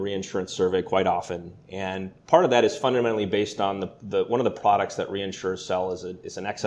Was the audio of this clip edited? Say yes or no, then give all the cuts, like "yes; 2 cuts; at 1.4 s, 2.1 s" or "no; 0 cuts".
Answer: no; 0 cuts